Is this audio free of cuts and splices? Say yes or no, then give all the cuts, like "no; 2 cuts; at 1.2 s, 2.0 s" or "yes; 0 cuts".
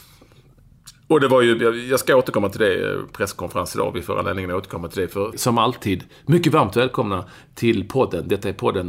no; 1 cut; at 5.3 s